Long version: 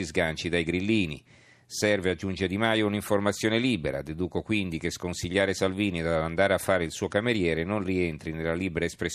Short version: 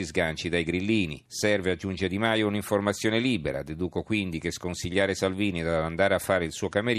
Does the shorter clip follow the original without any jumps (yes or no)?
no